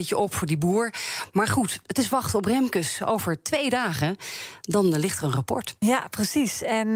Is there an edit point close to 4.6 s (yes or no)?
no